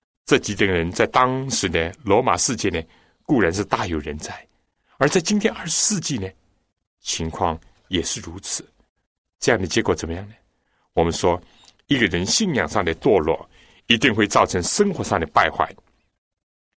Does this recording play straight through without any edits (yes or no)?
yes